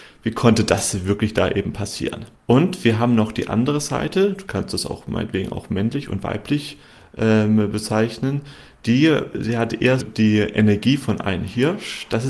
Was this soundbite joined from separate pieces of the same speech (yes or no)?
yes